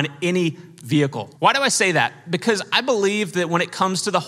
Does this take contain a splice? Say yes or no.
yes